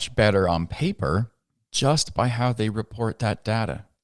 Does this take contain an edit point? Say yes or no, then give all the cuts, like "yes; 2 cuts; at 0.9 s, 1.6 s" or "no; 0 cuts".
no; 0 cuts